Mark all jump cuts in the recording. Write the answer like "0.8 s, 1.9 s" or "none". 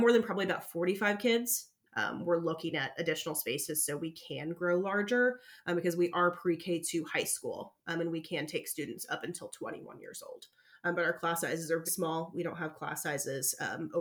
1.9 s, 11.9 s